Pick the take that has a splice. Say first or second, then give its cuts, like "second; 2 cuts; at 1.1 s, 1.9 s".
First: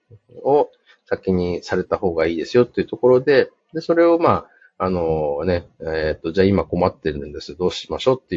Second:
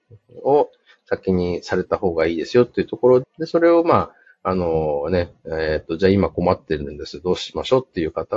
second; 1 cut; at 3.2 s